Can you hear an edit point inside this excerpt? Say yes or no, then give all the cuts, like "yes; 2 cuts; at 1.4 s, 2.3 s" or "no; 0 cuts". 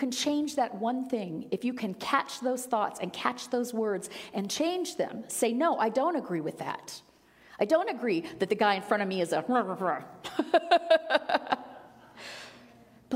no; 0 cuts